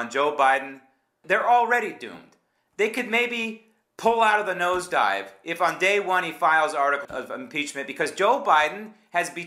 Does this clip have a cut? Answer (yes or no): yes